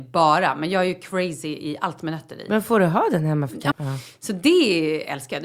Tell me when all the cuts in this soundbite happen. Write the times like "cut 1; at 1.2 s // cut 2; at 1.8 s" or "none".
cut 1; at 3.7 s